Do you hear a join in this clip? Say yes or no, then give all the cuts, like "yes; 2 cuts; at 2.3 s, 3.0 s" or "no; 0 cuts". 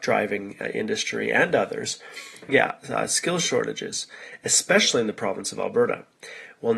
yes; 1 cut; at 2.5 s